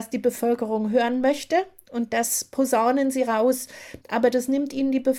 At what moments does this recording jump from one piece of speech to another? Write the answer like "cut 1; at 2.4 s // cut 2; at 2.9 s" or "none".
cut 1; at 4.0 s